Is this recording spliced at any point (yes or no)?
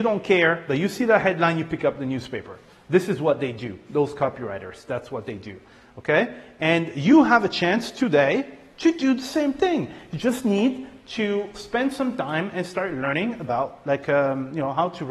no